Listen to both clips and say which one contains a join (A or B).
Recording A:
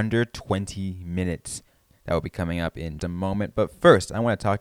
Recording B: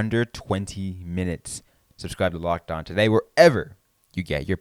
A